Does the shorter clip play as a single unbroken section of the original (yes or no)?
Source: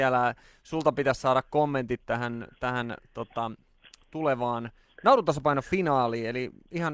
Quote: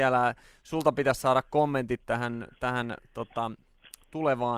yes